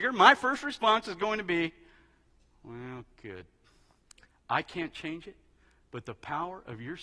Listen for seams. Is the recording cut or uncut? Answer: cut